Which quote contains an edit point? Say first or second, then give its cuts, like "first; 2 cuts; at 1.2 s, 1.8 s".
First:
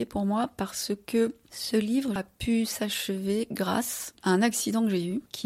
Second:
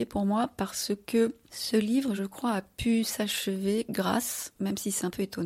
first; 2 cuts; at 2.2 s, 4.1 s